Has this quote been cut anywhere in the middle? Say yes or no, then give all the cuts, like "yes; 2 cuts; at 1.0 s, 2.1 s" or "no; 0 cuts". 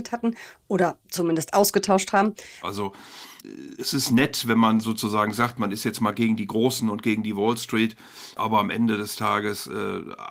yes; 1 cut; at 2.6 s